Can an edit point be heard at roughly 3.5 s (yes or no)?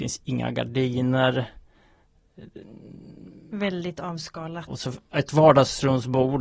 no